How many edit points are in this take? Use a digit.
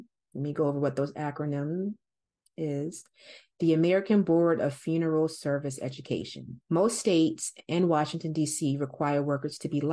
1